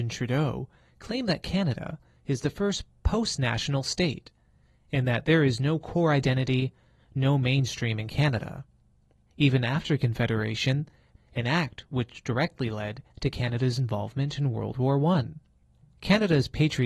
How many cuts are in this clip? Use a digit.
2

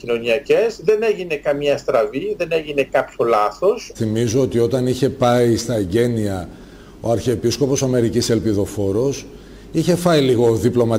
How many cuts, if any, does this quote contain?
1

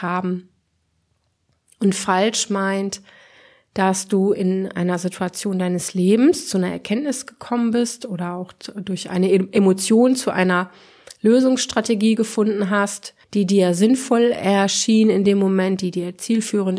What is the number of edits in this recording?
1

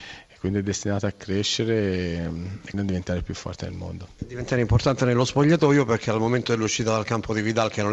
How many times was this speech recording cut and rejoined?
1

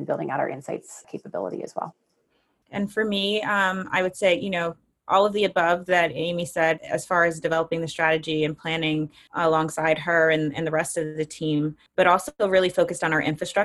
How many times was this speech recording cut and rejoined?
1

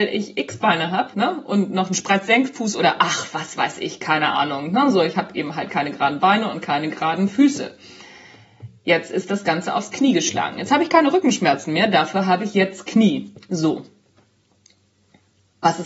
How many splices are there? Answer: 1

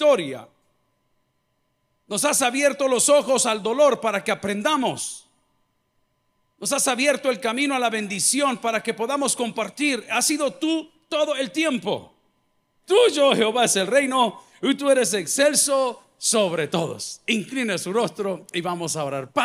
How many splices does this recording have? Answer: 1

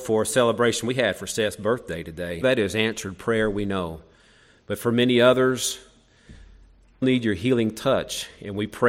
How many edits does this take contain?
2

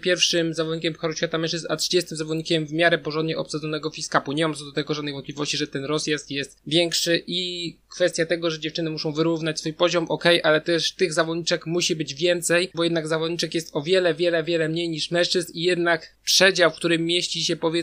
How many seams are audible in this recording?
1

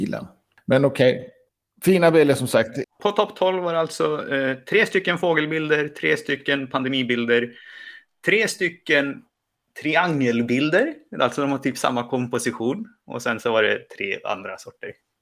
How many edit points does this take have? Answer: 1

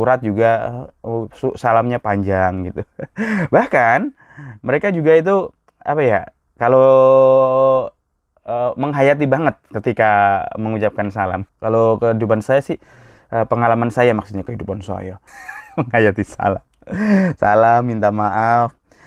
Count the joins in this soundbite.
2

